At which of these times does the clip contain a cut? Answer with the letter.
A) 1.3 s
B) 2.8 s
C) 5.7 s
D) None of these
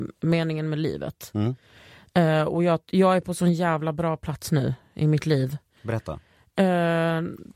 D